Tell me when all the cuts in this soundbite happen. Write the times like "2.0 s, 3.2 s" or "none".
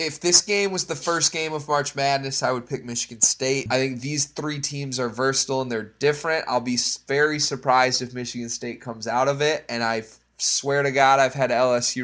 3.7 s